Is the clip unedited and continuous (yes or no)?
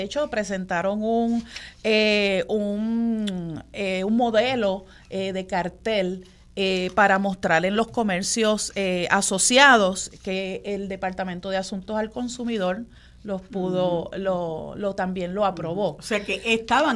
yes